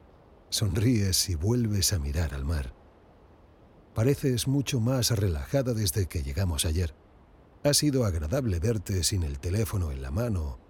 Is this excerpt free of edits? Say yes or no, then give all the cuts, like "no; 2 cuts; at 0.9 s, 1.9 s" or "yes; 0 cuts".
yes; 0 cuts